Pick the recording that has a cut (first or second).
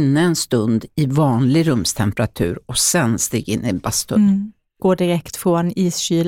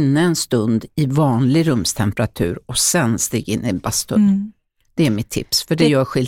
first